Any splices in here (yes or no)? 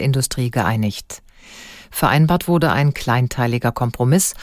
no